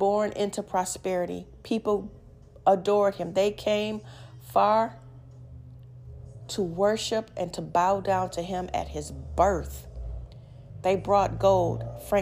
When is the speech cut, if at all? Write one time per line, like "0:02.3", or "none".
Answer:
none